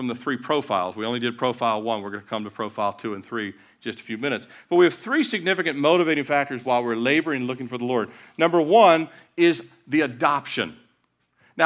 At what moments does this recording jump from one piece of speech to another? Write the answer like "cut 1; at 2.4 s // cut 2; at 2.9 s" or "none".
none

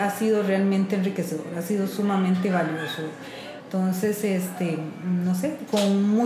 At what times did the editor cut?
cut 1; at 3.6 s

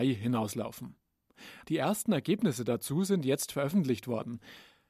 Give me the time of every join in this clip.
cut 1; at 1.6 s

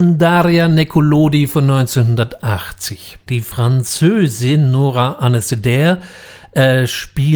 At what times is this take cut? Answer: cut 1; at 3.3 s

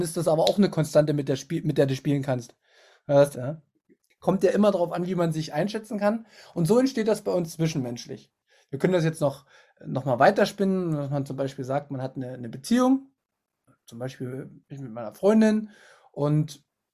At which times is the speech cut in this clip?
cut 1; at 3.3 s

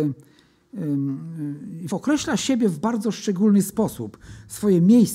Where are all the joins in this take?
cut 1; at 1.9 s

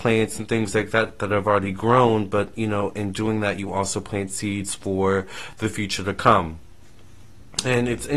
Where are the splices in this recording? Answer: none

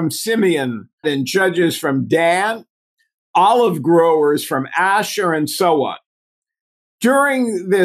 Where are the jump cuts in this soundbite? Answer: cut 1; at 1.0 s

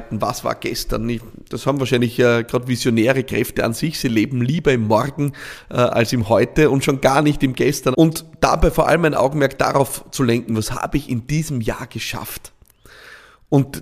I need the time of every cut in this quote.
cut 1; at 7.9 s // cut 2; at 10.5 s

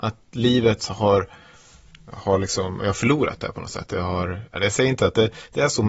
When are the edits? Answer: none

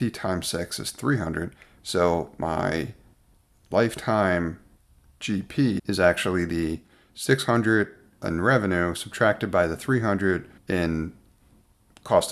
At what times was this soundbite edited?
cut 1; at 5.8 s // cut 2; at 10.6 s

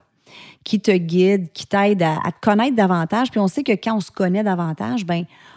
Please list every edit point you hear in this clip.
none

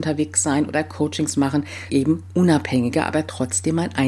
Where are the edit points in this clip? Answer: cut 1; at 1.9 s

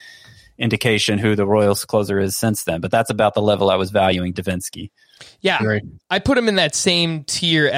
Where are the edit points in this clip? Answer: cut 1; at 5.6 s

